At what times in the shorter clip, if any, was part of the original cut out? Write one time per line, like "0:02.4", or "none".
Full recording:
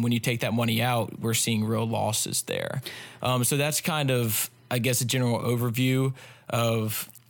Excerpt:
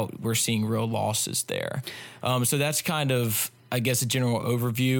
none

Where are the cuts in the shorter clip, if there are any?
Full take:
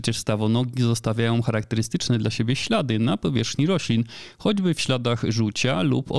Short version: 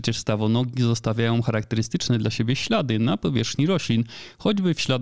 none

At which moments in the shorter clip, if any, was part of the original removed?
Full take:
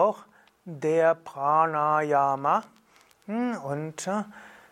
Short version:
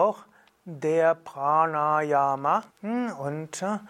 0:02.7

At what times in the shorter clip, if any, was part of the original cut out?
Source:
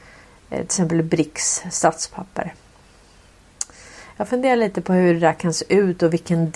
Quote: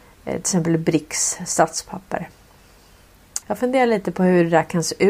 0:03.4

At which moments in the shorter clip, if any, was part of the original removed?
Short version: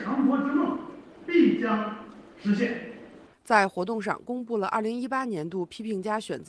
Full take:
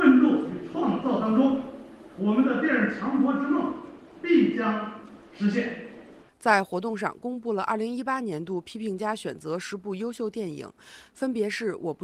none

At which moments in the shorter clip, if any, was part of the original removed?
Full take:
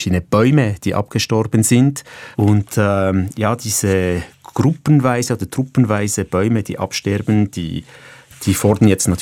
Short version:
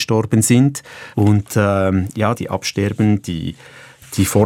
0:02.4

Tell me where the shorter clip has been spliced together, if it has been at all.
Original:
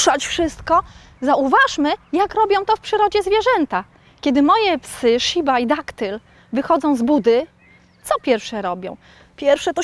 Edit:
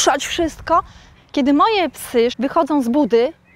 0:01.1
0:02.3

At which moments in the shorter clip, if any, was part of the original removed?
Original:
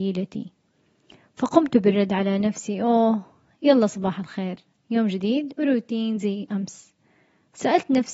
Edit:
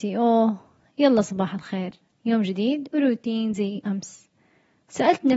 none

